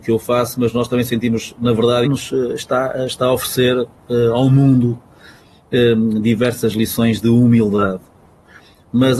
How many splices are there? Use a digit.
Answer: 1